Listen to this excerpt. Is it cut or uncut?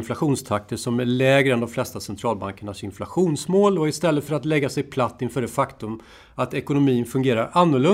uncut